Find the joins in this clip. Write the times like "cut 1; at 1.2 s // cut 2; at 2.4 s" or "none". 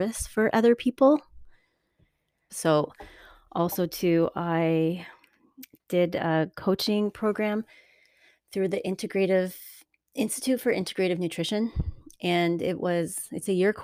cut 1; at 2.5 s